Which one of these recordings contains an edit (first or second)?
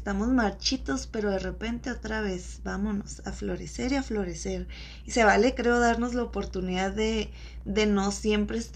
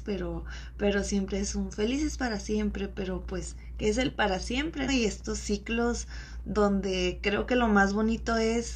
second